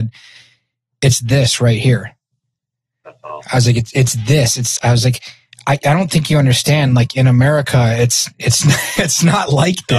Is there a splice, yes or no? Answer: no